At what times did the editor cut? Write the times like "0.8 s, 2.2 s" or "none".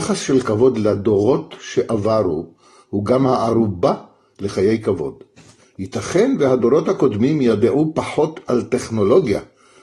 5.6 s